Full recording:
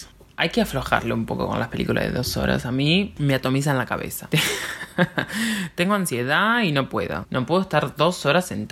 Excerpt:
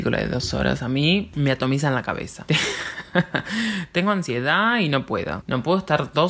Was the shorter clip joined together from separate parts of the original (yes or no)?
no